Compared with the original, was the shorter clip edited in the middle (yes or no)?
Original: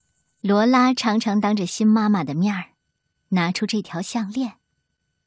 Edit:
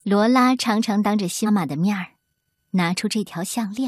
yes